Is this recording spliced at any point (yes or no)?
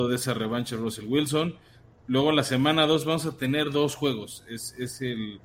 no